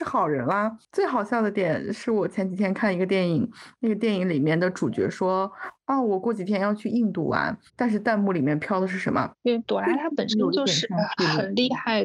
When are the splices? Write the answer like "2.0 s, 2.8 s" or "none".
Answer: 7.7 s, 9.3 s